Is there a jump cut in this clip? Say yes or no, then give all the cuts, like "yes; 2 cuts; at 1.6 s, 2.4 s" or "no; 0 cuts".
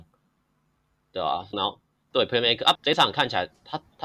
yes; 2 cuts; at 1.5 s, 2.8 s